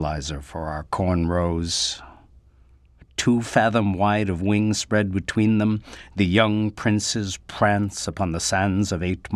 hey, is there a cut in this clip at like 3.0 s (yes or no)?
yes